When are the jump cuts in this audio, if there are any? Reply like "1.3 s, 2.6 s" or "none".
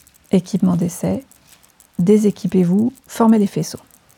none